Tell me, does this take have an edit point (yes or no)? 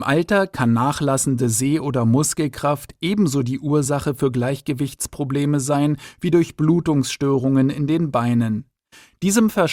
no